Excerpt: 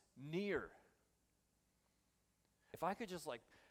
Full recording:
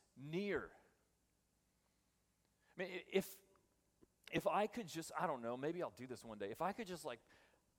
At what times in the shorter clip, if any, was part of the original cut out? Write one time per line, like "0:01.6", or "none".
0:02.7